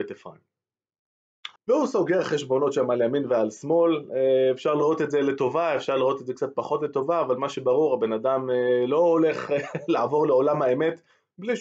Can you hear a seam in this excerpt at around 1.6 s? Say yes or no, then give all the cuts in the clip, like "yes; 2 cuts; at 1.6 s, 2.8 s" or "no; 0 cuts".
yes; 1 cut; at 1.6 s